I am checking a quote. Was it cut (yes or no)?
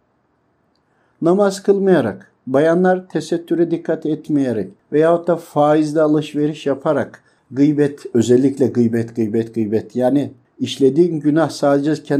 no